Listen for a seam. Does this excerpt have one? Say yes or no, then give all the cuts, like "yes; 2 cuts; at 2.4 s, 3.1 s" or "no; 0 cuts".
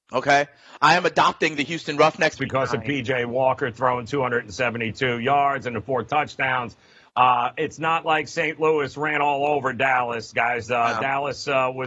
yes; 1 cut; at 2.3 s